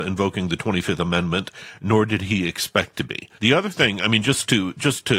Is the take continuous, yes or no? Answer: no